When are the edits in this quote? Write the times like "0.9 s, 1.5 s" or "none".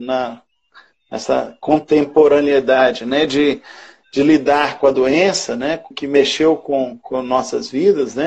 5.9 s